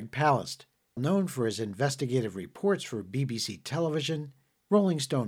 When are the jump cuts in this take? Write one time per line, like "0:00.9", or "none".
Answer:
0:01.0